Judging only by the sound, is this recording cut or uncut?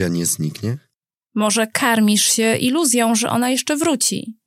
cut